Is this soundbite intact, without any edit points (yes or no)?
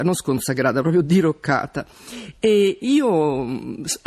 yes